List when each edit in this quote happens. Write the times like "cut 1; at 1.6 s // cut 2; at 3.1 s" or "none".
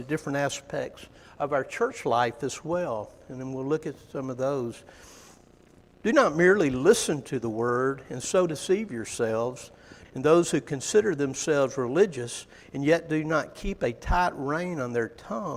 cut 1; at 6.0 s // cut 2; at 10.0 s